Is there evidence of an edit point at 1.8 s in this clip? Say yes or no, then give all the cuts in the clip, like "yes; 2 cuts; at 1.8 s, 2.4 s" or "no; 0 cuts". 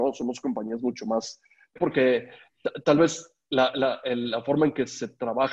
yes; 1 cut; at 1.8 s